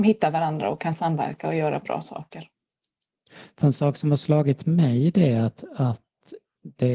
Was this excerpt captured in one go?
yes; 0 cuts

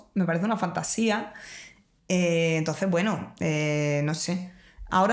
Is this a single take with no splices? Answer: yes; 0 cuts

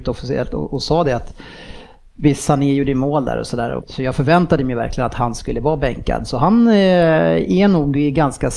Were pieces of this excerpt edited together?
yes; 1 cut; at 3.8 s

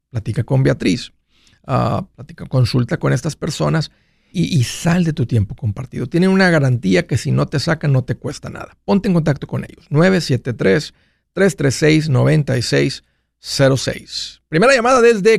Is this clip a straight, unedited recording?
no; 1 cut; at 4.3 s

